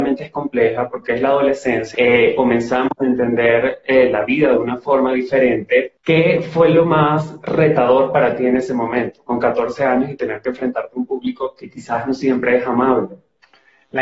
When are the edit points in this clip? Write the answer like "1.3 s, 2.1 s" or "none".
1.9 s, 6.0 s